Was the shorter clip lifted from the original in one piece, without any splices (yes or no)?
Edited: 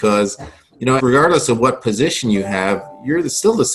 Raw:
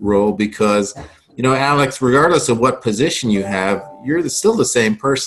no